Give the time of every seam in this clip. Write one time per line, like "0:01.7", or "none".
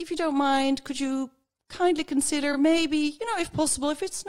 none